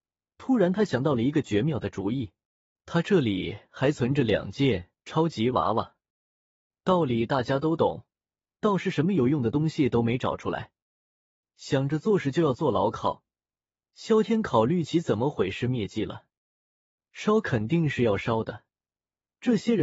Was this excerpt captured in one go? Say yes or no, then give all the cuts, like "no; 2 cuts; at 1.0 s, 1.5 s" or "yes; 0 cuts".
no; 1 cut; at 8.4 s